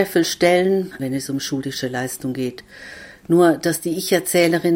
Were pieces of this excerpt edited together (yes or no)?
yes